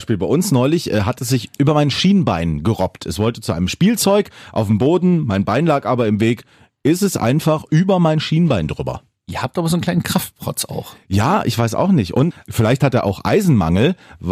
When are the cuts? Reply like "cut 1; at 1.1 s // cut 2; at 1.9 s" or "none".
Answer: none

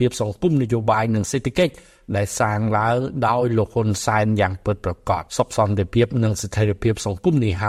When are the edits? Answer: cut 1; at 5.3 s

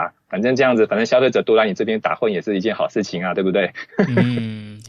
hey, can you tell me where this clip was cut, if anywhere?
none

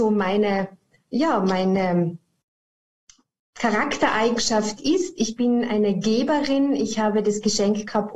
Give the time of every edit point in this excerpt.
none

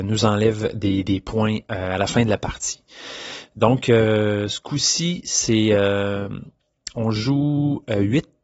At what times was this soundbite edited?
none

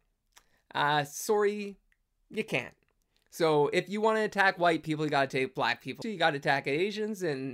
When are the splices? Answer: cut 1; at 6.0 s

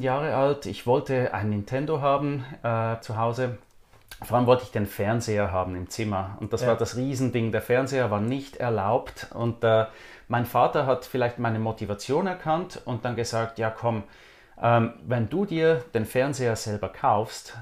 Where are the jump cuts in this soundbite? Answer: cut 1; at 3.0 s

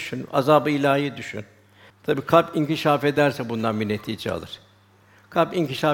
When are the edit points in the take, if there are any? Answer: cut 1; at 1.9 s

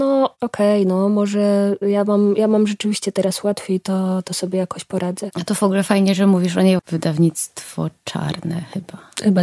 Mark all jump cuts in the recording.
cut 1; at 5.3 s // cut 2; at 6.8 s

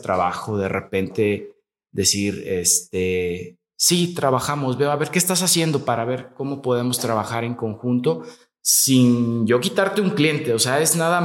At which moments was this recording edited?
none

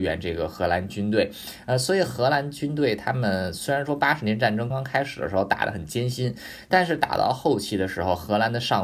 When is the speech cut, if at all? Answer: cut 1; at 4.7 s

